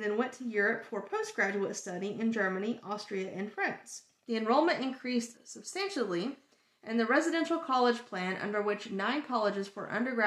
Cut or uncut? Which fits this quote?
cut